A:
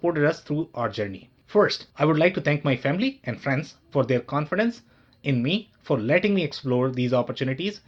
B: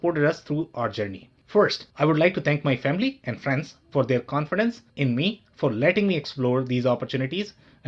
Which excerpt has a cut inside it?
B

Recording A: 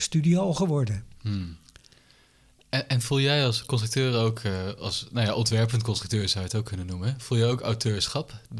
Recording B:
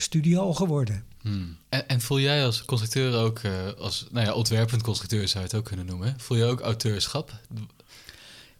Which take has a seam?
B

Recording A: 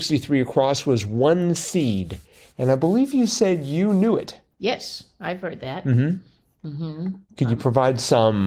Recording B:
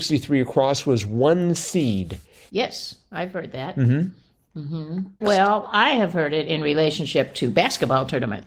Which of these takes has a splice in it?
B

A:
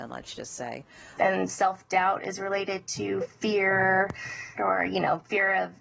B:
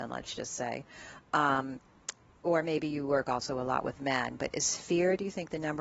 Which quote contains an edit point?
A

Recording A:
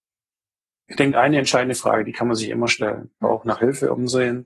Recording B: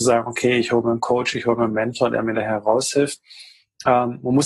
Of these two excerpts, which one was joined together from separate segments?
A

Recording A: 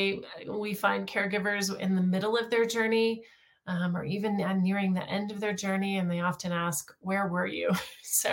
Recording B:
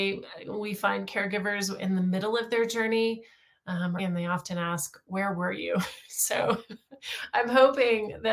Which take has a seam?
B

